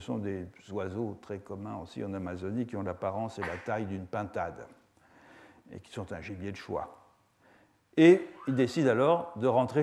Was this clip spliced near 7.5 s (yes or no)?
no